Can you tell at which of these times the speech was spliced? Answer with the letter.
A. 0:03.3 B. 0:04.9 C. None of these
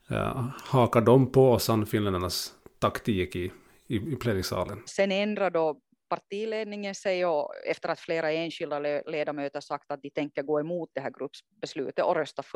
B